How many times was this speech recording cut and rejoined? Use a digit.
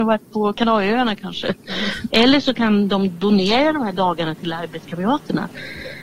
1